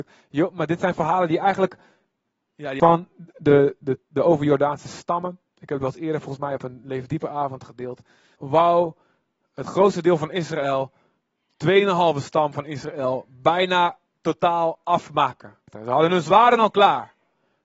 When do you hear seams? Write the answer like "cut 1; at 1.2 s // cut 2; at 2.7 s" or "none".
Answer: cut 1; at 2.5 s